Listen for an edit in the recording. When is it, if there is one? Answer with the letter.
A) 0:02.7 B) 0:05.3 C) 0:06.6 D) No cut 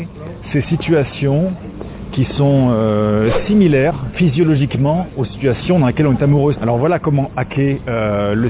C